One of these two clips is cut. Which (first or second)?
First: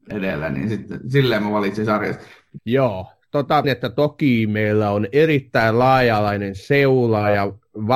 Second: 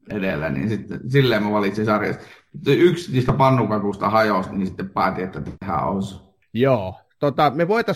first